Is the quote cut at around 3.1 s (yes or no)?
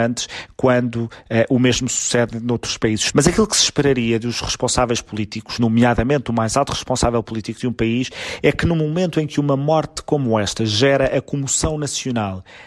yes